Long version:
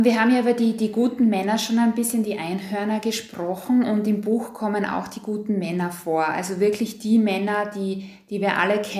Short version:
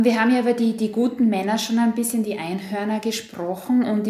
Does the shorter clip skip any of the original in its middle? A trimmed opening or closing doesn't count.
no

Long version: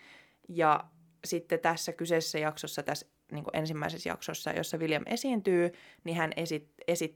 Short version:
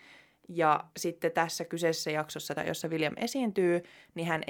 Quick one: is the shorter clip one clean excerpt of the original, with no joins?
no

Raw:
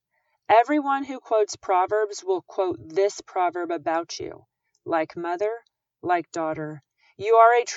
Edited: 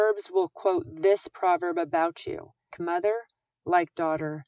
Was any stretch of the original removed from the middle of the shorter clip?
yes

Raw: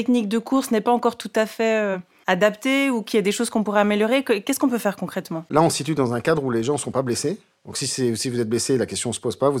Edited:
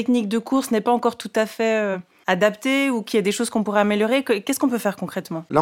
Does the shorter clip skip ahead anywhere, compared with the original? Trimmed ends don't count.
no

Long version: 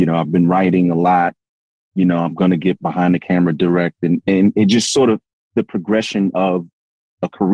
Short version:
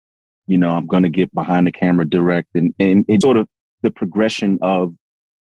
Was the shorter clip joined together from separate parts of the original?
yes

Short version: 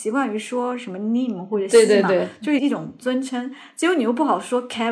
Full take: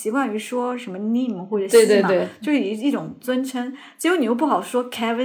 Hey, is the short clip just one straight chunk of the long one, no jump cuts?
no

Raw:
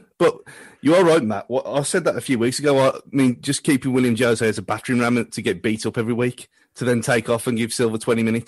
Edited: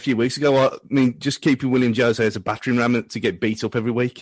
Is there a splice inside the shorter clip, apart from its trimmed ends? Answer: no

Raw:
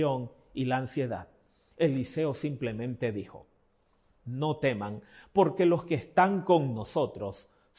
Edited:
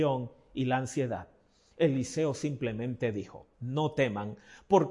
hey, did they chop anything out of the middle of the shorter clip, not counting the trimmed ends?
yes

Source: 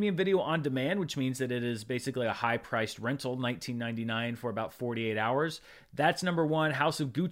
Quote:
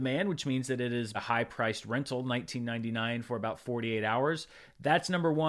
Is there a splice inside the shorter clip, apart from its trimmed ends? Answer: yes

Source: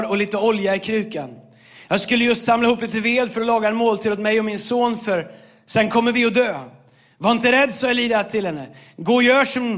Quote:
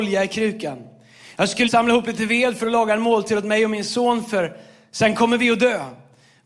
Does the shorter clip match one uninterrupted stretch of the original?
no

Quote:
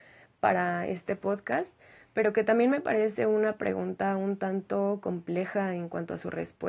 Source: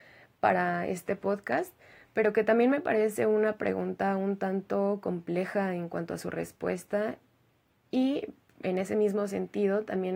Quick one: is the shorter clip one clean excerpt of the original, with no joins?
yes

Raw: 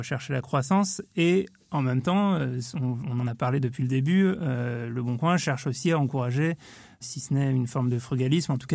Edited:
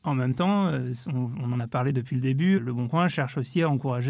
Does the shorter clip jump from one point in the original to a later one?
yes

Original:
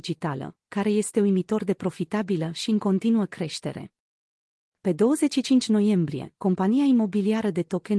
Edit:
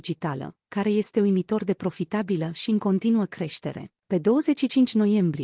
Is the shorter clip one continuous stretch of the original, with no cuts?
no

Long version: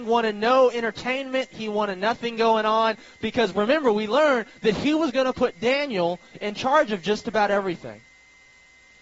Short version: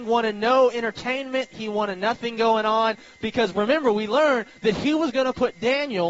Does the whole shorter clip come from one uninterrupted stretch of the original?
yes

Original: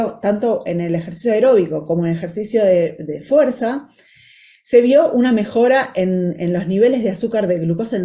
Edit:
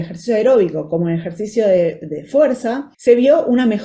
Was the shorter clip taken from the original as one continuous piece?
no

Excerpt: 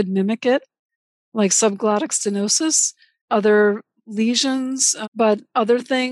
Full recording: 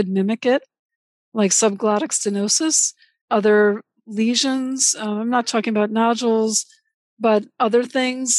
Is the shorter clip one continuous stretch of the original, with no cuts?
no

